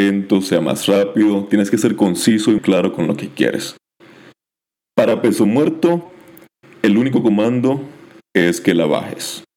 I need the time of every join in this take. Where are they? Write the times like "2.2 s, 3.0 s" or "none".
2.6 s